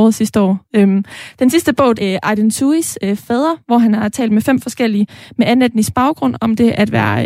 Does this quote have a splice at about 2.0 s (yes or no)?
yes